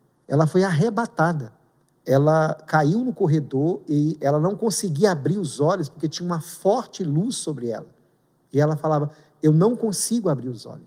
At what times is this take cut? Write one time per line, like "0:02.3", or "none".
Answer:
none